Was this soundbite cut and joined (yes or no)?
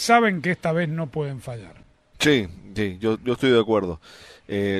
no